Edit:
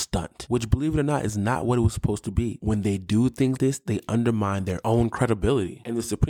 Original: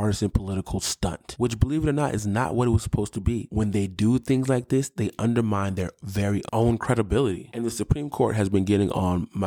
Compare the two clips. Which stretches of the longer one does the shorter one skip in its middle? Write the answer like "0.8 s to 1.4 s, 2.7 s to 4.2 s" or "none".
4.5 s to 4.7 s, 5.9 s to 6.5 s